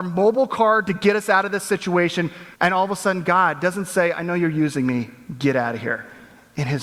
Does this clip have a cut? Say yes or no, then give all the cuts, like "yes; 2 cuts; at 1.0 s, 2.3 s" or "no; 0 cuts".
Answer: yes; 1 cut; at 2.5 s